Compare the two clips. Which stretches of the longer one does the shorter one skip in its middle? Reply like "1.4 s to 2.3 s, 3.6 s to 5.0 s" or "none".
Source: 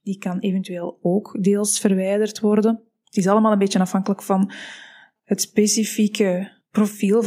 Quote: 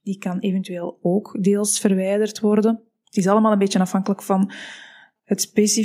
none